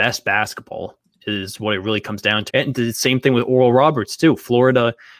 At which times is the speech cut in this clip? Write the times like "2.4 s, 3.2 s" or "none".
2.5 s